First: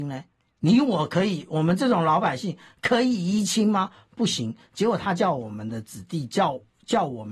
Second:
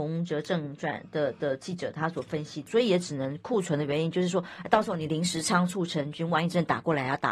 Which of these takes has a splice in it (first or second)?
second